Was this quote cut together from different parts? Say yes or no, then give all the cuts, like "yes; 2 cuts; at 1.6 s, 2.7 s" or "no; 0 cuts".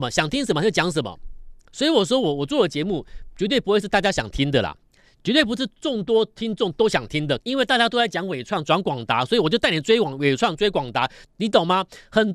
yes; 2 cuts; at 7.4 s, 11.2 s